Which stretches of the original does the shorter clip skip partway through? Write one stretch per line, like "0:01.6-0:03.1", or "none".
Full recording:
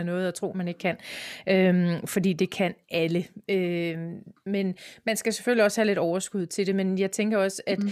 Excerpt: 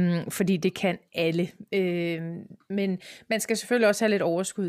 none